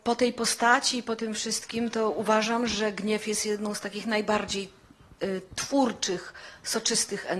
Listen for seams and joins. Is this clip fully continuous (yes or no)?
yes